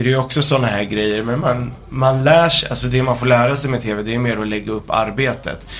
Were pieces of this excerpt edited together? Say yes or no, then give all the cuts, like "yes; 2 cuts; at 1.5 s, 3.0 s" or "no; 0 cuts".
no; 0 cuts